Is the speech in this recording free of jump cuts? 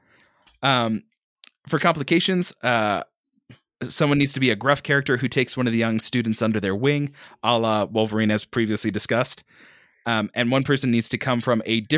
yes; 0 cuts

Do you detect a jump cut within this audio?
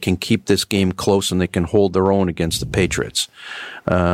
no; 0 cuts

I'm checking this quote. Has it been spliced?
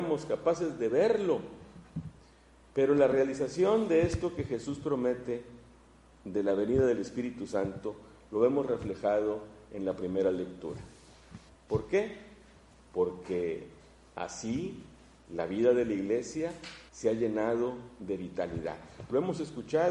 yes; 2 cuts; at 11.5 s, 16.9 s

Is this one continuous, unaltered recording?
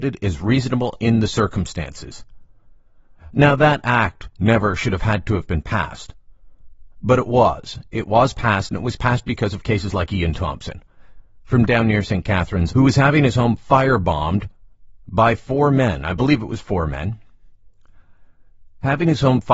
no; 1 cut; at 12.7 s

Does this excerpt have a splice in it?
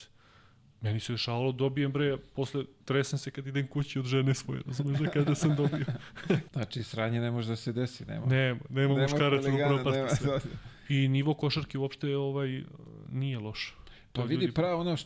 yes; 1 cut; at 6.5 s

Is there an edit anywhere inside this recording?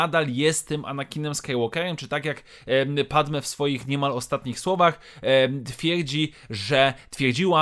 no; 0 cuts

